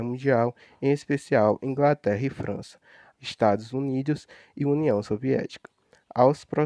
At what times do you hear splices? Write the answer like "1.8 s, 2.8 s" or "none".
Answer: 3.1 s